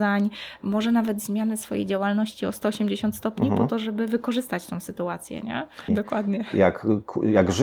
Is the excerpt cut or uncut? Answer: cut